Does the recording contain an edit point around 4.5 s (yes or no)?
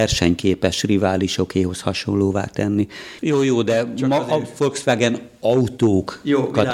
no